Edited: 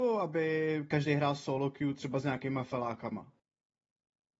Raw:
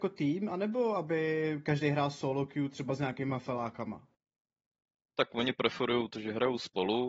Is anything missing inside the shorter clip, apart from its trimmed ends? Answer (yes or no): no